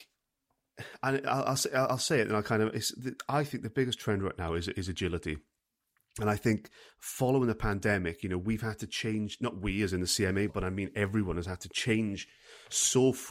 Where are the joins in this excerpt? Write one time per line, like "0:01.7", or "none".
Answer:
0:10.5